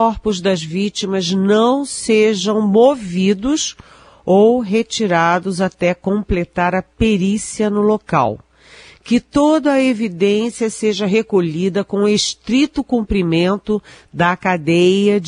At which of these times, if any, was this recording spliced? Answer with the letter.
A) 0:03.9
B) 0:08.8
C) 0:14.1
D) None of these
D